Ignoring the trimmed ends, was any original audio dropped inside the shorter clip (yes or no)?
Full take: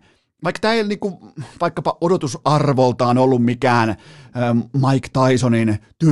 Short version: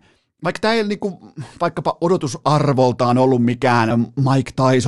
yes